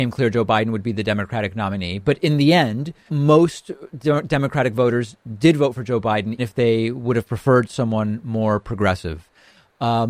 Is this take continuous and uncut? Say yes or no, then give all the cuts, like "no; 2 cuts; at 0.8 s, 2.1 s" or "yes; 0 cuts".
no; 2 cuts; at 3.1 s, 6.4 s